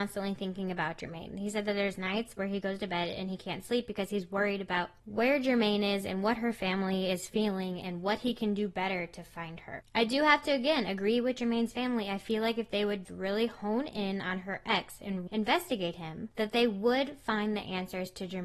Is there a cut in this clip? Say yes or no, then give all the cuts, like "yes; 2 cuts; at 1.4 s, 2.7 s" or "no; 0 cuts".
yes; 2 cuts; at 13.0 s, 15.3 s